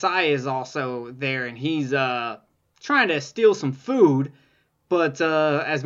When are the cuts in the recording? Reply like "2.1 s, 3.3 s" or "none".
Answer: none